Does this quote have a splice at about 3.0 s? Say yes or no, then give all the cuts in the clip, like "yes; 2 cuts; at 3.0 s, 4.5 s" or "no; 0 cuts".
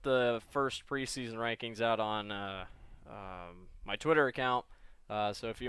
no; 0 cuts